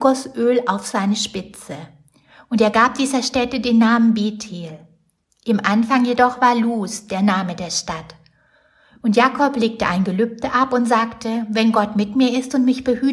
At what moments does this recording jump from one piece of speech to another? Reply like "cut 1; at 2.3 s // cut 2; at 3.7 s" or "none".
none